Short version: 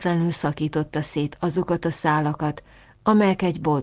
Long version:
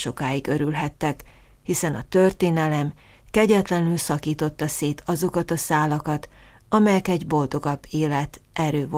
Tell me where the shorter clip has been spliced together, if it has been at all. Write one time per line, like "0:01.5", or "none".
none